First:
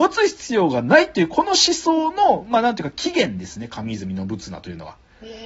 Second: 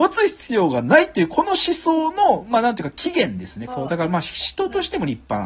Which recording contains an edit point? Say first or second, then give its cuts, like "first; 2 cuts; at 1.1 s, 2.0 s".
second; 1 cut; at 3.7 s